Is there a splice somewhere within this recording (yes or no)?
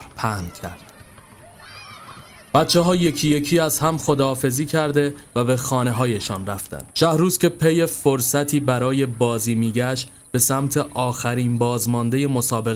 yes